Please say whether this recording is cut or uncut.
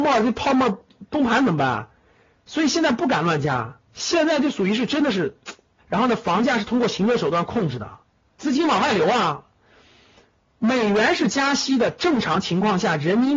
cut